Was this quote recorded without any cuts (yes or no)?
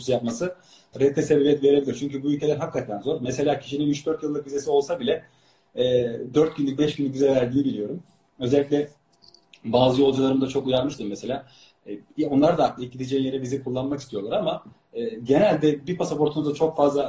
yes